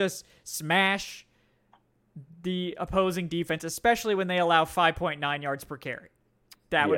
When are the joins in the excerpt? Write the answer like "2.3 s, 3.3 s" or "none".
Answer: none